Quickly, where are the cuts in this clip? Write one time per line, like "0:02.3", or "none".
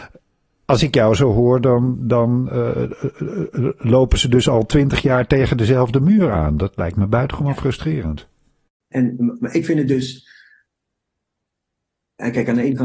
0:08.9